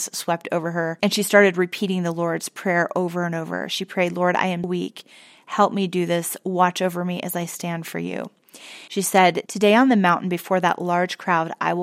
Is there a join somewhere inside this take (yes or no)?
yes